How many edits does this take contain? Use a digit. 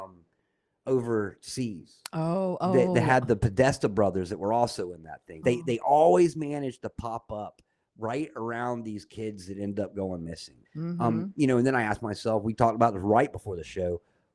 2